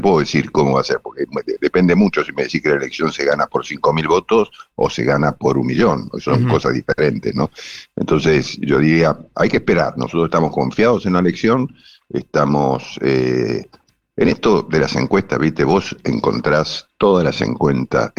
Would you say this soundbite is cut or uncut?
uncut